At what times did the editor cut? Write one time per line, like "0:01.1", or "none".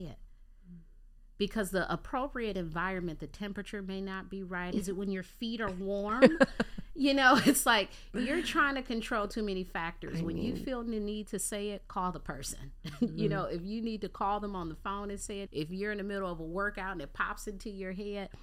0:04.7
0:15.5